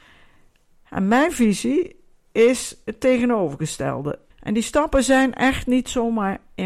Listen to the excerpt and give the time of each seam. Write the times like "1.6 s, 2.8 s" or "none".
4.3 s